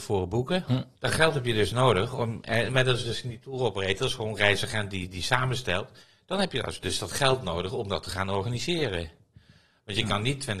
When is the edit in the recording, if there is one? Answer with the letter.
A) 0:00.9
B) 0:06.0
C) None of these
A